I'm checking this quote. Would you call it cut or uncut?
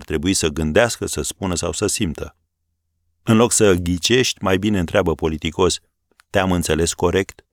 uncut